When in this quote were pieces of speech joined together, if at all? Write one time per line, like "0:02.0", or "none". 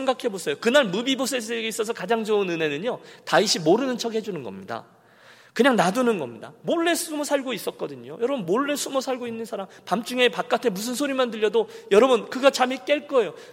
none